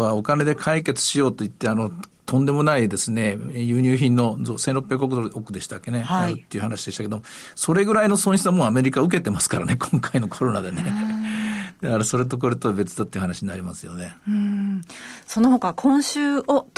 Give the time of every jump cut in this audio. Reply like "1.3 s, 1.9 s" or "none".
none